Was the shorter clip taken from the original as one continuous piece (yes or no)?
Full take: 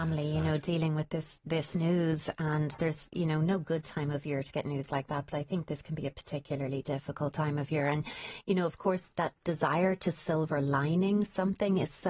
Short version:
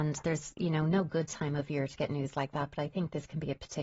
yes